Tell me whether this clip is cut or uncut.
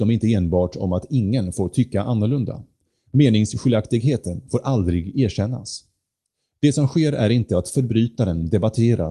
uncut